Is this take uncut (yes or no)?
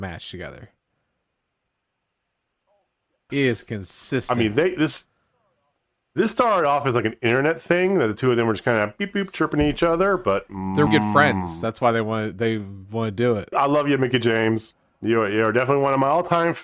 no